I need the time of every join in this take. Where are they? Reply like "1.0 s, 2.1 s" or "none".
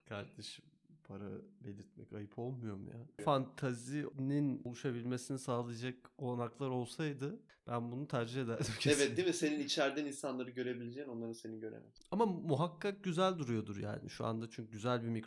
3.2 s